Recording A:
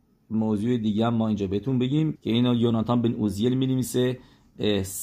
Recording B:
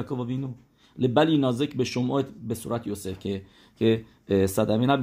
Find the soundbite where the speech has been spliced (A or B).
A